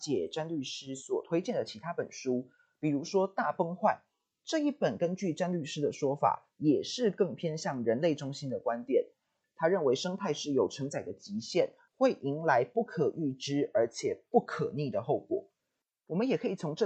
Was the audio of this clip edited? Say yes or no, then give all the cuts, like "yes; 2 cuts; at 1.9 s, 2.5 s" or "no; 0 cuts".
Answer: yes; 2 cuts; at 9.4 s, 11.9 s